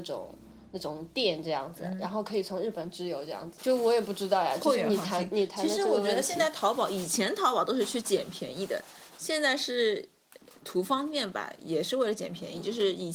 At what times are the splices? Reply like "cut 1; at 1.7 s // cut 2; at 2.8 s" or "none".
cut 1; at 3.6 s